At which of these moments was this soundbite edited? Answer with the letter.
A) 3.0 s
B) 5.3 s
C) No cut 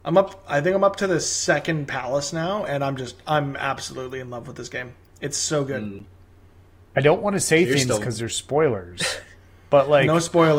C